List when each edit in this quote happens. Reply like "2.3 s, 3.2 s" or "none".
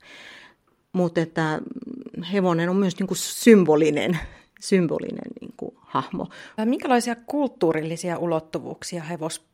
6.6 s